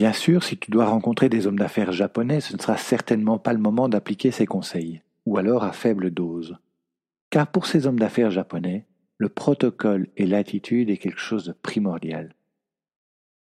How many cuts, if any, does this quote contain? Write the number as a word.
zero